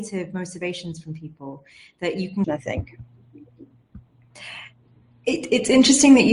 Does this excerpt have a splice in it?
yes; 1 cut; at 2.4 s

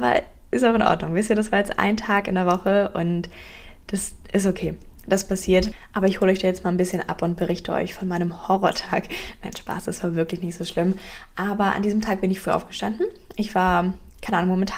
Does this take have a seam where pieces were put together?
no; 0 cuts

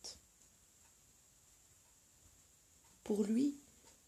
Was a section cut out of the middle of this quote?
yes; 1 cut; at 2.9 s

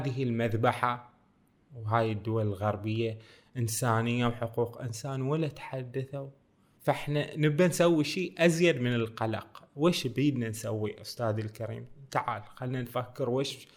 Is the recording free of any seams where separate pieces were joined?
yes; 0 cuts

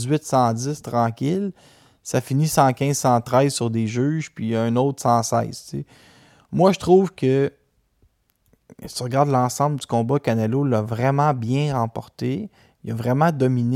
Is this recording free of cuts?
yes; 0 cuts

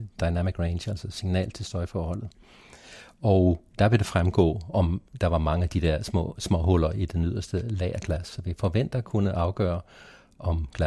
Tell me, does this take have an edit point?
no; 0 cuts

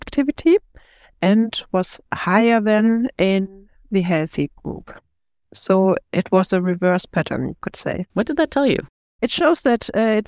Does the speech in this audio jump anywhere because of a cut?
yes; 1 cut; at 1.1 s

